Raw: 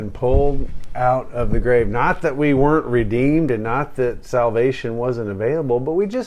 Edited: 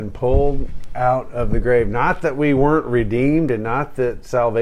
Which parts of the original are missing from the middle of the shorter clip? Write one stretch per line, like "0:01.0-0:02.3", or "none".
none